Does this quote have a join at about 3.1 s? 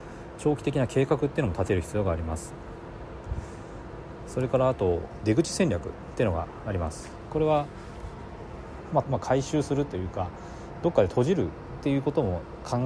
no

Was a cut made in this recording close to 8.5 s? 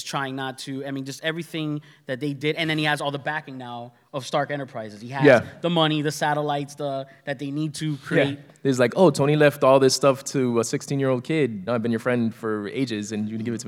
yes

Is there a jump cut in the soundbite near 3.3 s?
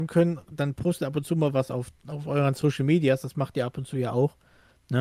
no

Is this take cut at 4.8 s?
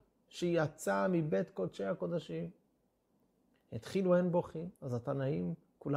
yes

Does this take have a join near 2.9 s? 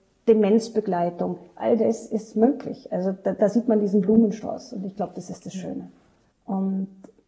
no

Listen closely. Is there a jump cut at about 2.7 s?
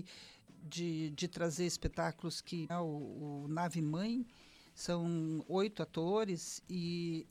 yes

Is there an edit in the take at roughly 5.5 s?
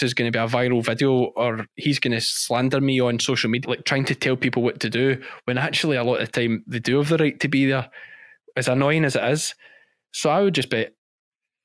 no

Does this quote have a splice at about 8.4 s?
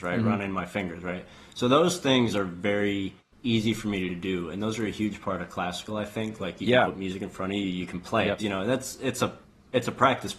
yes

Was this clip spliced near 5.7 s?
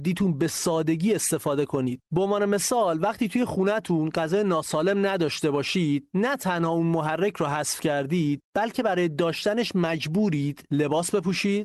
no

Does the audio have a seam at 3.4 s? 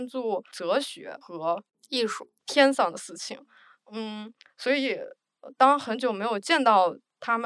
no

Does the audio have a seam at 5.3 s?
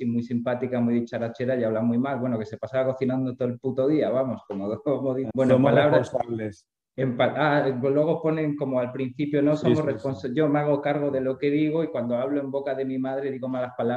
yes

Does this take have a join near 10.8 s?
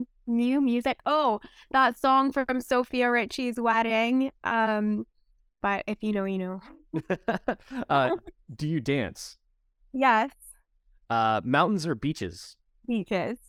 no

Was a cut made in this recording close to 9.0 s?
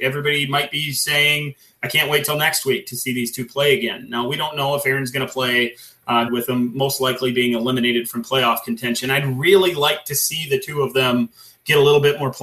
no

